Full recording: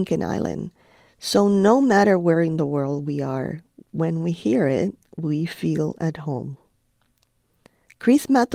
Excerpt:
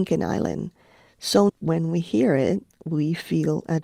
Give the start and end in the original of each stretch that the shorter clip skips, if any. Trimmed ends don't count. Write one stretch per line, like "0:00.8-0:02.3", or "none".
0:01.5-0:03.8